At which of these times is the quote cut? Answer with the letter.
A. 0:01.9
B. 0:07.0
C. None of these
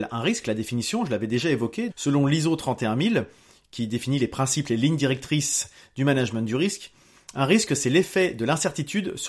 A